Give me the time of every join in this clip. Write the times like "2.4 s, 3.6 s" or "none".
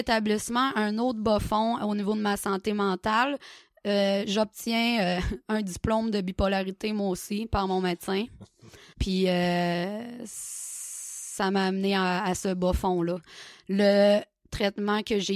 8.9 s